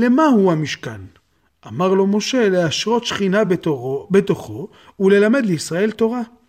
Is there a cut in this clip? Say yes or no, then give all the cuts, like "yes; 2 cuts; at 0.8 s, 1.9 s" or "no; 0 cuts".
no; 0 cuts